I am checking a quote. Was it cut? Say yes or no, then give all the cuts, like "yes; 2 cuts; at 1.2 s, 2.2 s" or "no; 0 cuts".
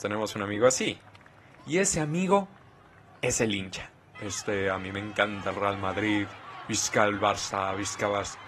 yes; 1 cut; at 4.1 s